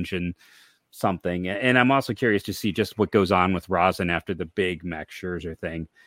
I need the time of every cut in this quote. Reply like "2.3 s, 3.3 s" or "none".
none